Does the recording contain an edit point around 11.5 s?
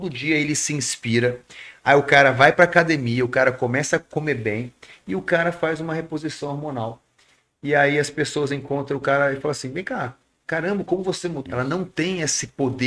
yes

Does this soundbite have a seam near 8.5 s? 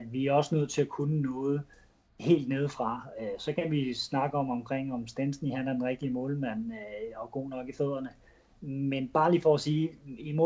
yes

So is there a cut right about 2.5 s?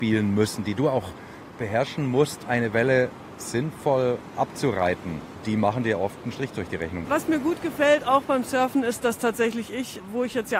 yes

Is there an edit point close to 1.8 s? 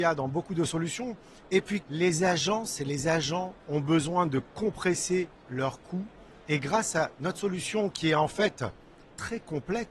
yes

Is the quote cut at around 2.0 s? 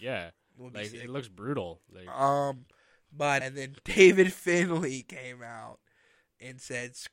no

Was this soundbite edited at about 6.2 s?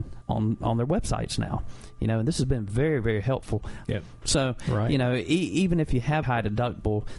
yes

